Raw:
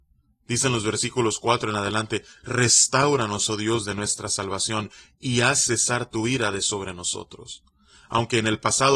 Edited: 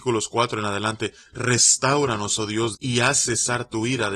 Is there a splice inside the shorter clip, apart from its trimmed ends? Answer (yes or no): yes